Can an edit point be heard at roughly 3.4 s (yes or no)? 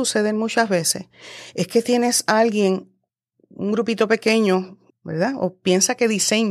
no